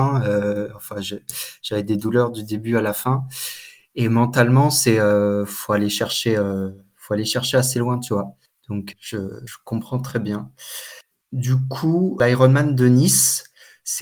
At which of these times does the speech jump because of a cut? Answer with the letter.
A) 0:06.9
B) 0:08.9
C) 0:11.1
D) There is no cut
B